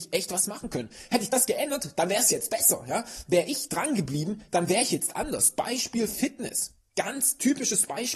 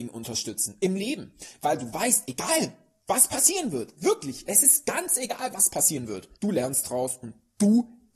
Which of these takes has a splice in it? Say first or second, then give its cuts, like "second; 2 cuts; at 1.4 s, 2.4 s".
second; 1 cut; at 6.3 s